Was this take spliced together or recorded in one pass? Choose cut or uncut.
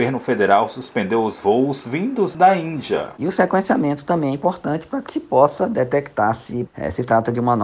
cut